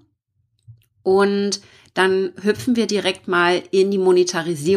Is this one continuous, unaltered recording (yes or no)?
yes